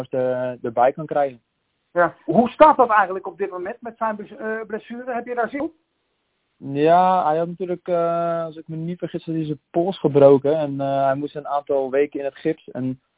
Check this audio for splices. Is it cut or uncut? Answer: cut